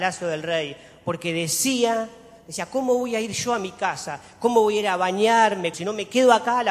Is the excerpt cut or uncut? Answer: cut